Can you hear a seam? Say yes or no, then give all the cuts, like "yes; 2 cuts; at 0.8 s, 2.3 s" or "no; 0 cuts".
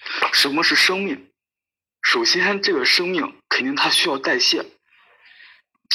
no; 0 cuts